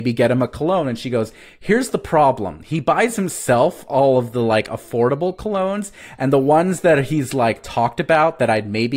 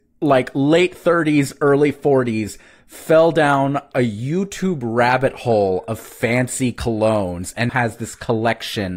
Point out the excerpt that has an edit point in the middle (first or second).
second